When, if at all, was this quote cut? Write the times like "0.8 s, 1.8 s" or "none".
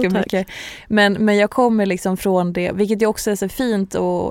none